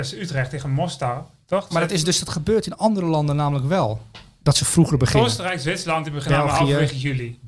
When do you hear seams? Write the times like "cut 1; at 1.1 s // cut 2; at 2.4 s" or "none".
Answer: cut 1; at 1.7 s